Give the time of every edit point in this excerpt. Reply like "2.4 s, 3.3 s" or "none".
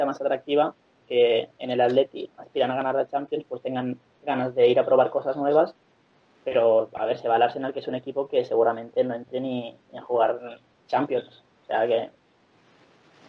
1.0 s